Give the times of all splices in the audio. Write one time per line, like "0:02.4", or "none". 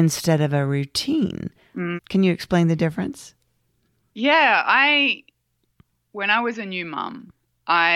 0:02.0